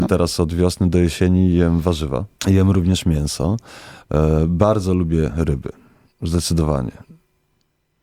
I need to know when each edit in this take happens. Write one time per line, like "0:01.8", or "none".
0:02.4

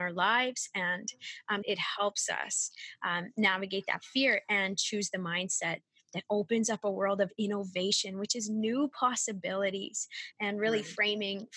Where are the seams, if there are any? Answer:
0:01.6

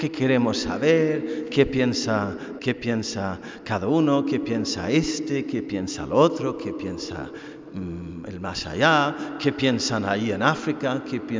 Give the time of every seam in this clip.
0:02.6

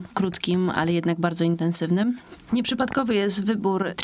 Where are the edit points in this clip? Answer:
0:02.5

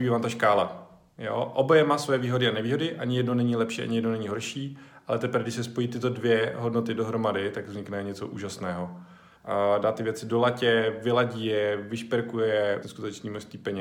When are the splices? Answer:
0:09.4
0:12.8

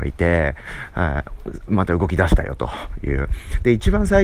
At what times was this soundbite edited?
none

